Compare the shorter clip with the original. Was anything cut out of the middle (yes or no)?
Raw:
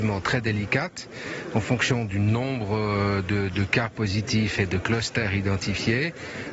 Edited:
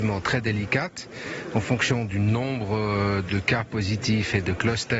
yes